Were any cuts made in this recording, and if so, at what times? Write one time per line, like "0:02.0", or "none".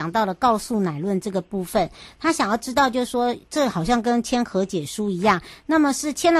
none

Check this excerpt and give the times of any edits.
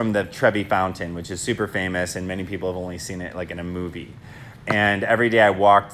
none

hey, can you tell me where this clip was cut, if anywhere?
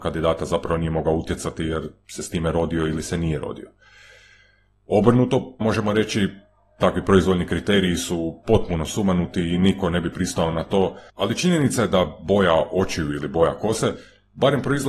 0:05.6
0:11.1

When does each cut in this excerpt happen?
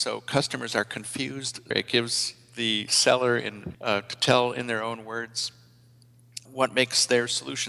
0:01.7
0:03.7
0:06.5

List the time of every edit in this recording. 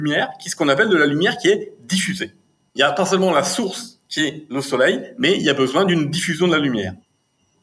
0:02.7

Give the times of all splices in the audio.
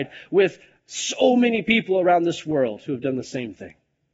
none

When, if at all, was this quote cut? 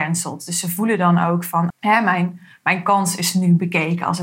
0:01.7

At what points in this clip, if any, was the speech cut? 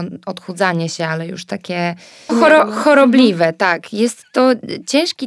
0:02.3

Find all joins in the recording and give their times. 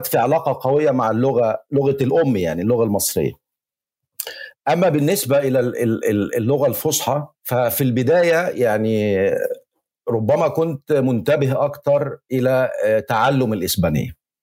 0:07.3

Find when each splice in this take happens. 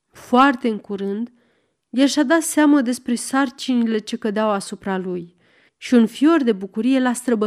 0:05.7

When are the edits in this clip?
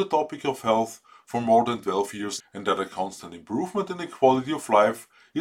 0:02.4

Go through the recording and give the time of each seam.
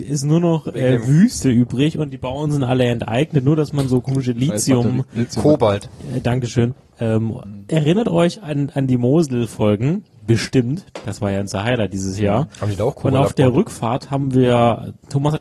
none

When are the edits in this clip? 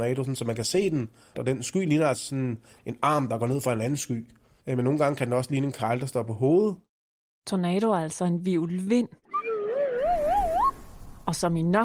none

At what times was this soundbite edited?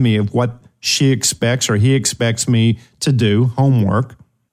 none

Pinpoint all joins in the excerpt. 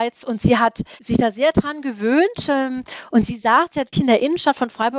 0:03.9

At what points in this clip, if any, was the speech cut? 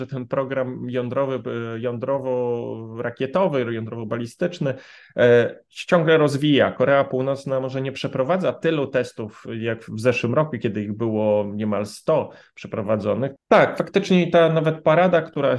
0:13.4

